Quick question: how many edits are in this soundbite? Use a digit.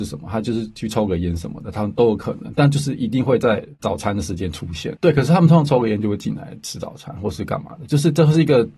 1